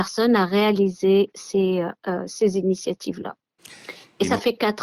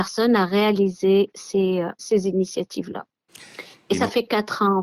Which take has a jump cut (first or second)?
second